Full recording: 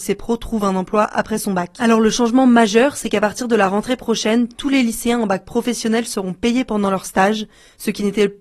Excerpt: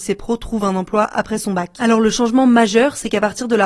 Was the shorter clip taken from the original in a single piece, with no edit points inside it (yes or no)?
yes